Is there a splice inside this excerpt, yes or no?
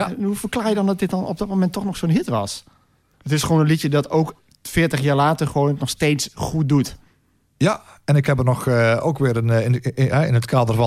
yes